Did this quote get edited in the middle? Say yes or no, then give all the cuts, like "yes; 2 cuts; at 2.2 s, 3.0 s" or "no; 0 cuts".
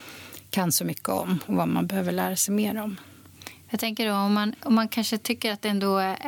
no; 0 cuts